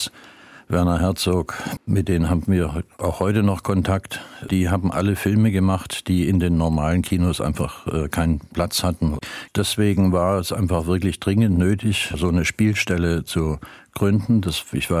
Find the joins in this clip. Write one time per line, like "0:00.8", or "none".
0:01.8